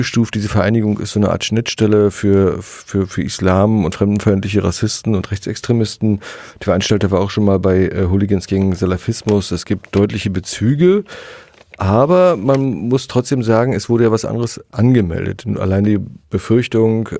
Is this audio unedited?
yes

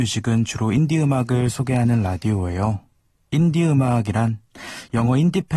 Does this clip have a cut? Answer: no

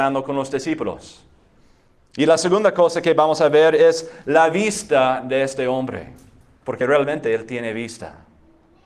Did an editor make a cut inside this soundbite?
no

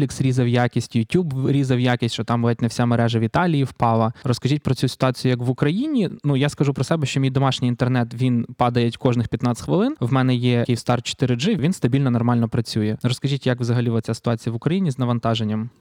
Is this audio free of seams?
yes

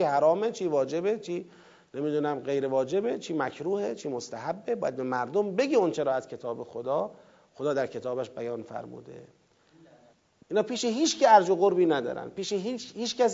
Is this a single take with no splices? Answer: no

